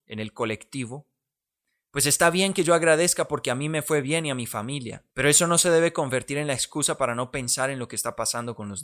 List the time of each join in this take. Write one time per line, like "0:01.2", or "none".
0:05.1